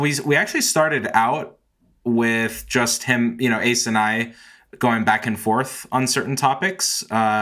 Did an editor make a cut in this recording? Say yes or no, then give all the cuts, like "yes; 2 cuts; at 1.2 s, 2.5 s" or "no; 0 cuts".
no; 0 cuts